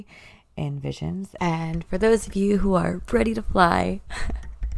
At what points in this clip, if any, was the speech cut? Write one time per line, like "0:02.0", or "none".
0:01.4